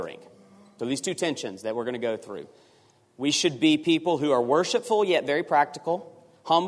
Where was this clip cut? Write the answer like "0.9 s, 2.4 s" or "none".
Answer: none